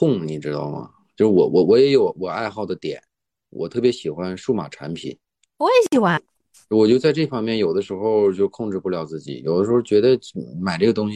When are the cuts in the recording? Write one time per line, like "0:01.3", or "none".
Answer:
0:06.2